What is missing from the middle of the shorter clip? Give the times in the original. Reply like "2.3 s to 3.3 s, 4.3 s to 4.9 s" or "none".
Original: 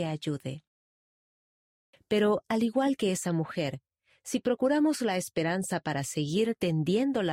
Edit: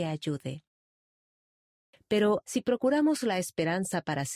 2.4 s to 4.2 s

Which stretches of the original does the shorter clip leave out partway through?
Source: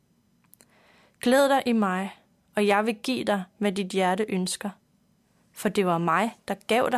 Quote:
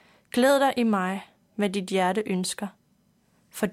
2.4 s to 3.5 s

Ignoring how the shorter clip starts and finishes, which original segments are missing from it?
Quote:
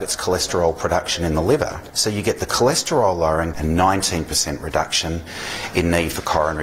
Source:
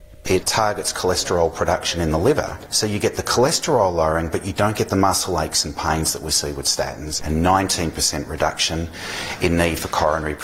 4.3 s to 7.2 s

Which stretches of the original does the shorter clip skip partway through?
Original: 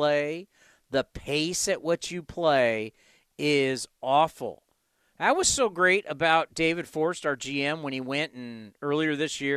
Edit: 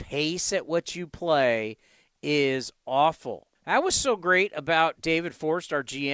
4.7 s to 5.1 s

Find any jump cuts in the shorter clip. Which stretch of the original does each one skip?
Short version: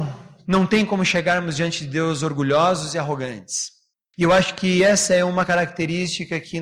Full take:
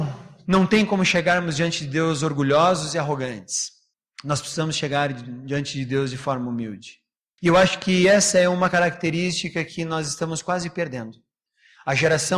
4.0 s to 7.2 s

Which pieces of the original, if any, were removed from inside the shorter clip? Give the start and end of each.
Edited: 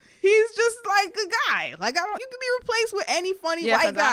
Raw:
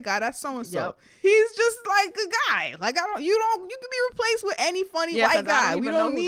3.2 s to 3.7 s

